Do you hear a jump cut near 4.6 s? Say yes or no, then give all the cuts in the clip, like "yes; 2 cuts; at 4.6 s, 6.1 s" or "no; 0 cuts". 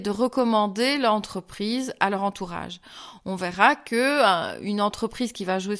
no; 0 cuts